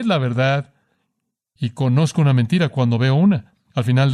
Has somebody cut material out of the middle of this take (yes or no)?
no